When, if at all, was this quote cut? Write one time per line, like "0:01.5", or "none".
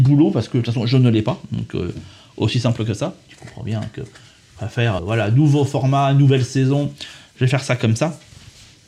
0:03.3
0:05.0